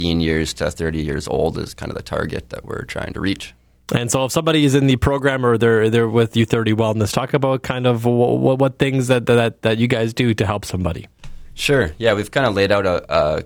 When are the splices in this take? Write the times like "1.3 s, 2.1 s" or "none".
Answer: none